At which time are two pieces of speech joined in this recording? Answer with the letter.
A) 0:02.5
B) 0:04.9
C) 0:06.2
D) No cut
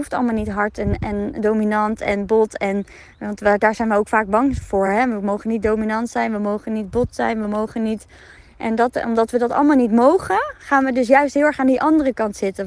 D